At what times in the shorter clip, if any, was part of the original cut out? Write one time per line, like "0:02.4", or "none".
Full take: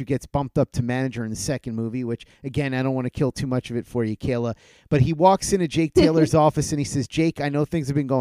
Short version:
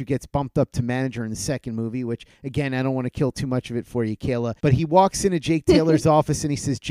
0:04.6